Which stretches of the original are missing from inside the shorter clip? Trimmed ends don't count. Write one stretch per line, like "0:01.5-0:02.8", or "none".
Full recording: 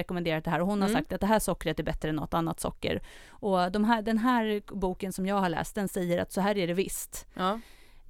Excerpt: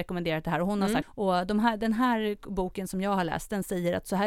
0:01.0-0:03.3